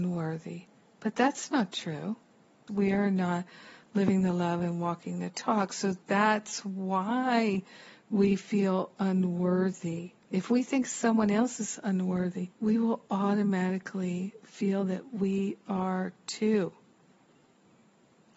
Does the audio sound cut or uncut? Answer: cut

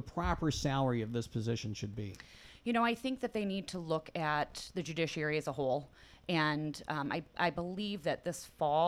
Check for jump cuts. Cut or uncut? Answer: uncut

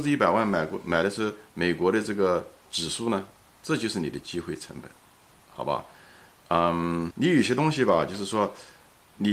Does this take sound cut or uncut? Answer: cut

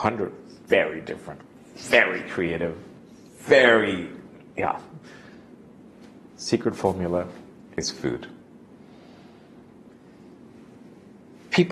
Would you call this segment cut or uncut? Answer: uncut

